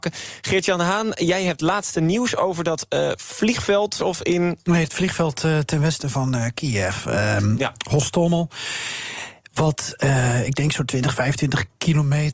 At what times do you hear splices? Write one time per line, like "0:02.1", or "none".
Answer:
0:04.0